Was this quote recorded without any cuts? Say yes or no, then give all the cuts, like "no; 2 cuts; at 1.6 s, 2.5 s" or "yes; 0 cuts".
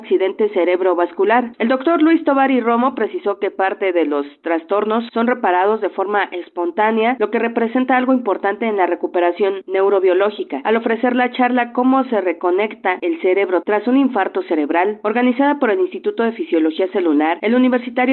no; 1 cut; at 1.5 s